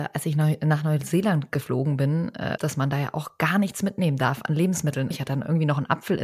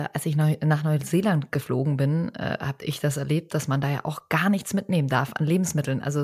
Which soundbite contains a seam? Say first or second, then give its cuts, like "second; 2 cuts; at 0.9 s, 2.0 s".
first; 2 cuts; at 2.6 s, 5.1 s